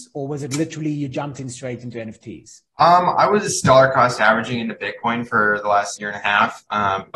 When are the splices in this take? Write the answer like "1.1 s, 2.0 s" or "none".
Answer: 2.7 s, 6.0 s